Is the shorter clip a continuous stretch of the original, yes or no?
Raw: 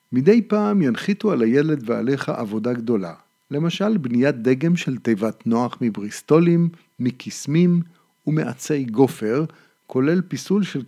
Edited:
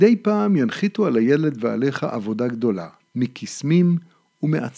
no